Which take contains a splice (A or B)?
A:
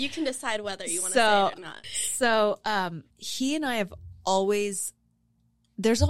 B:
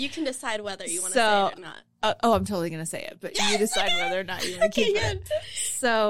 A